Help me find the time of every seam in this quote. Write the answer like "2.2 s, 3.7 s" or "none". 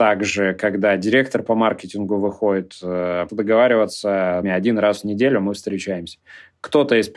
3.3 s, 4.4 s